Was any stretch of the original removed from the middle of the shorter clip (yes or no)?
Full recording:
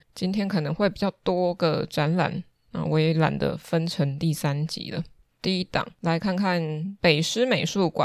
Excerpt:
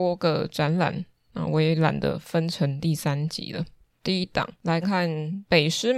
yes